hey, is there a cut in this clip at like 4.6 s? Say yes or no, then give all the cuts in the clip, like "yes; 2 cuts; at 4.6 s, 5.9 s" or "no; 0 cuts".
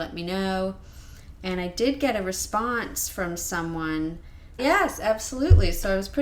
yes; 1 cut; at 4.6 s